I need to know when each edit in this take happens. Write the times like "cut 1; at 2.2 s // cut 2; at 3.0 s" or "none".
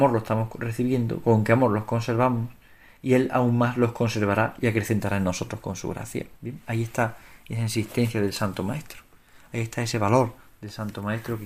cut 1; at 6.4 s